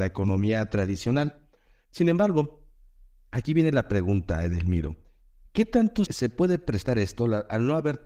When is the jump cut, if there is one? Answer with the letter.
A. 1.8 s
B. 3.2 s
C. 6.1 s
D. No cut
C